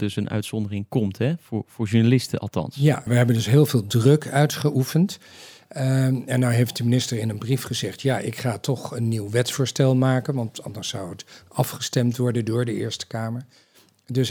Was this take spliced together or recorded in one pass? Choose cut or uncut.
cut